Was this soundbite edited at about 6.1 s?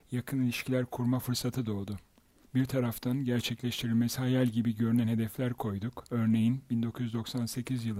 yes; 2 cuts; at 2.4 s, 6.1 s

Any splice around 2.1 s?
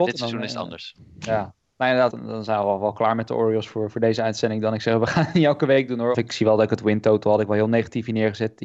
yes; 2 cuts; at 2.1 s, 6.1 s

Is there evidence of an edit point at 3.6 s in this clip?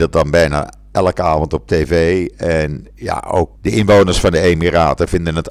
yes; 1 cut; at 3.6 s

